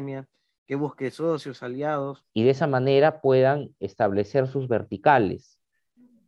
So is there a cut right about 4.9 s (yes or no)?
no